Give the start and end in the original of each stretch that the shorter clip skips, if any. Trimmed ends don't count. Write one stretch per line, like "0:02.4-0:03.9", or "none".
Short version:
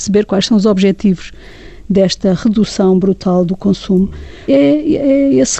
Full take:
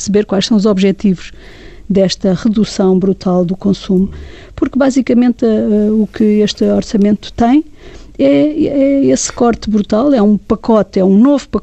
0:04.5-0:08.2